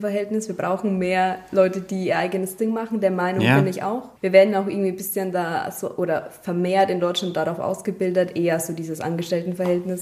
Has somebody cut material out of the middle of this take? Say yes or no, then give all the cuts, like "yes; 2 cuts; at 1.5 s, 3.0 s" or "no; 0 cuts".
yes; 1 cut; at 4.2 s